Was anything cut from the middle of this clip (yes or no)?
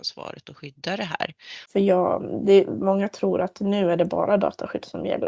yes